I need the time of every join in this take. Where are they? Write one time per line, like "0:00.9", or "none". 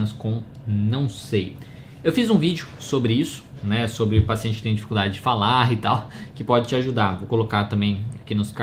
none